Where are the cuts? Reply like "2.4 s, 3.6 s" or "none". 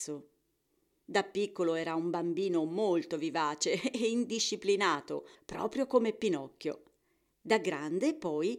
5.4 s